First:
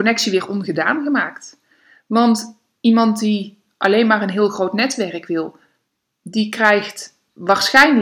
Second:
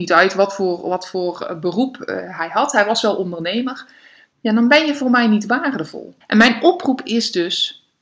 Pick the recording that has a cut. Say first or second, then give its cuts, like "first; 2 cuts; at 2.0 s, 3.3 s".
second; 2 cuts; at 4.3 s, 6.2 s